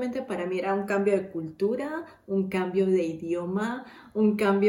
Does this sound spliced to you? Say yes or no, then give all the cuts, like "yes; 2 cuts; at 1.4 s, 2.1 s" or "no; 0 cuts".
no; 0 cuts